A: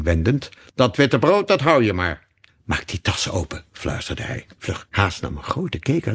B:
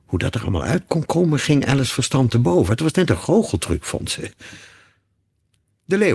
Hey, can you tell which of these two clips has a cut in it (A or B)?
A